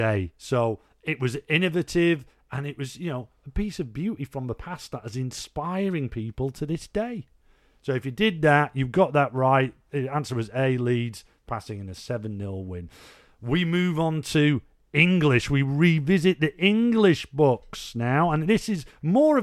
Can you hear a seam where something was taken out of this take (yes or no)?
no